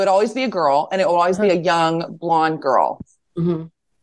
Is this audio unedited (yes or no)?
yes